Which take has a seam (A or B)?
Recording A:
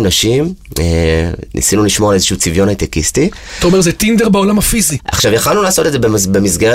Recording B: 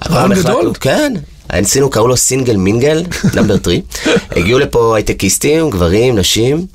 A